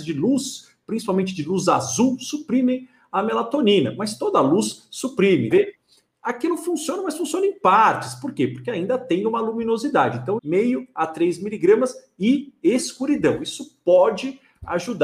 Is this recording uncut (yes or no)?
no